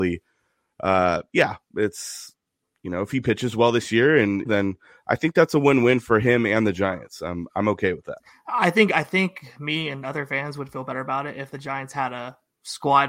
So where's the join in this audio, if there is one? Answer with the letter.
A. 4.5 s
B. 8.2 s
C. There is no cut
A